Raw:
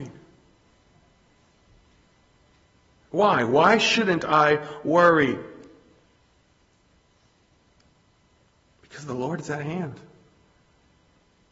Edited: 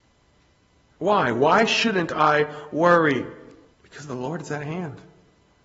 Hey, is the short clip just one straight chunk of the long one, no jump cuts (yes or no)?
no